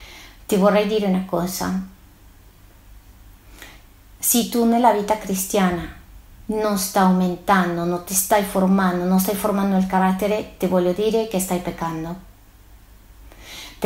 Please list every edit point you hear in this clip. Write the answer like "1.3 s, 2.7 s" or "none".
none